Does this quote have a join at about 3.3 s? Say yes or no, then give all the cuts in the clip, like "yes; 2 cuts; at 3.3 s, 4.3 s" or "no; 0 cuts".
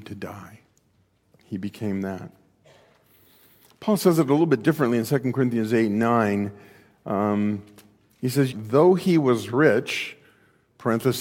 no; 1 cut; at 8.5 s